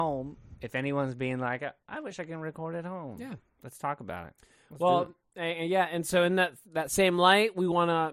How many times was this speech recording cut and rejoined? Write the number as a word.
zero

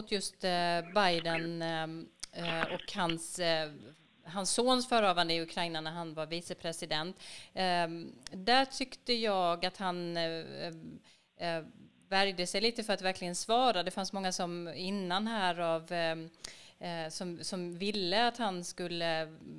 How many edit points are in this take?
zero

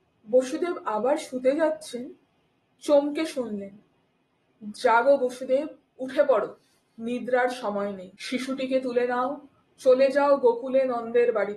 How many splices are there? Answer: two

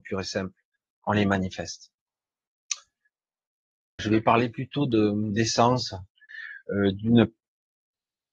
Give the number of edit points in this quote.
two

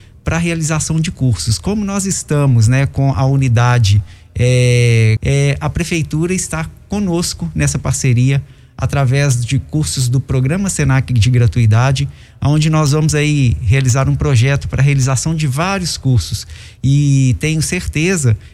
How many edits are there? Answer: one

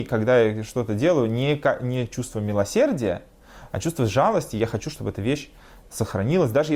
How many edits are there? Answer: zero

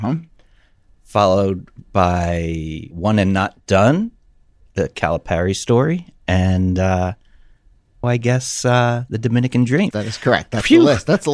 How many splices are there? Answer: two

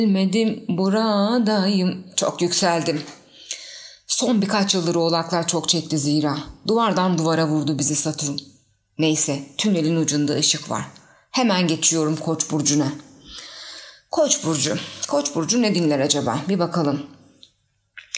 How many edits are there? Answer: zero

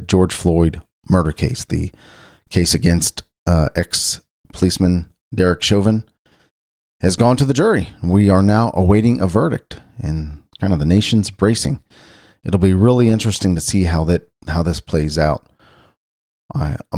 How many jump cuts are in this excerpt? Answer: zero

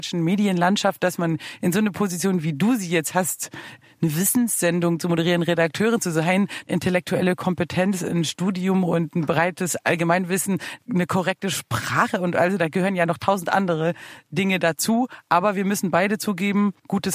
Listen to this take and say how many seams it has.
one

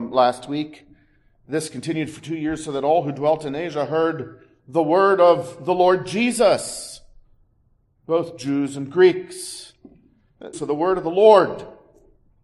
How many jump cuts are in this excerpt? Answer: one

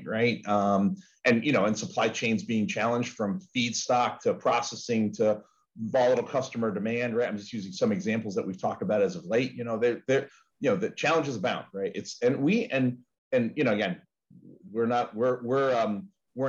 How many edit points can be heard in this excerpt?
zero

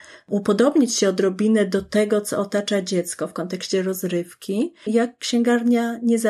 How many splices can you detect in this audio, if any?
one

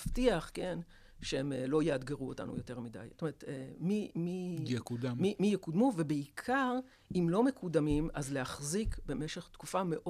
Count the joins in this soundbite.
one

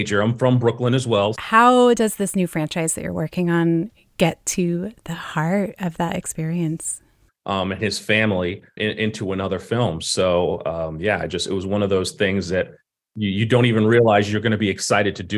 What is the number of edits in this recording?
two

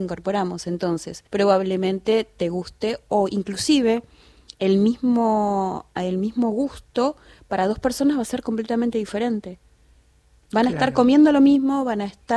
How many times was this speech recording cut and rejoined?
one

